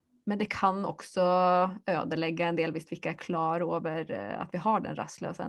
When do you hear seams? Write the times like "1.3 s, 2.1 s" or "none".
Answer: none